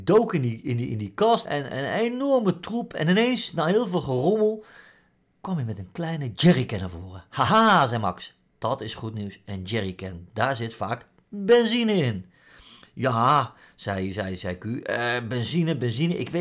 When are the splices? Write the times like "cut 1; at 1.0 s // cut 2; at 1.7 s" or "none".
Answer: cut 1; at 1.4 s